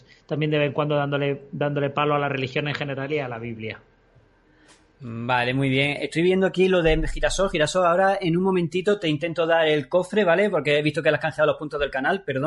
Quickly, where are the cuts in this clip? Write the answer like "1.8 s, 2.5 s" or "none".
none